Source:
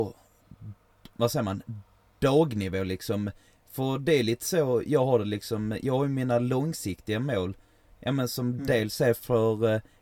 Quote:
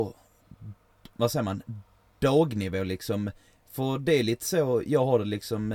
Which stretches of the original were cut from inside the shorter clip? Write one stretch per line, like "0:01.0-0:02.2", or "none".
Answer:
none